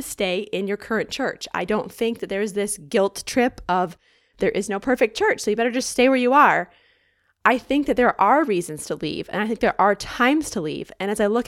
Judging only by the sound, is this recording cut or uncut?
uncut